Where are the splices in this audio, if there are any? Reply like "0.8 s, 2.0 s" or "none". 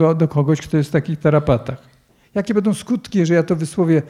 2.2 s